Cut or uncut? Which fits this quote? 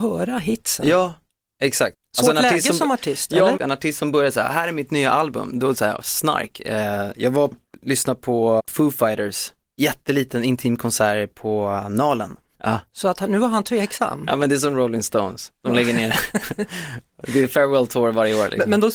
cut